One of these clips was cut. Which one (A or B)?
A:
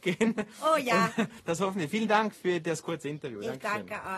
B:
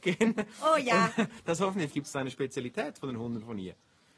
B